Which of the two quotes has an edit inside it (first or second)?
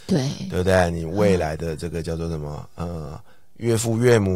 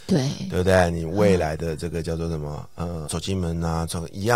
second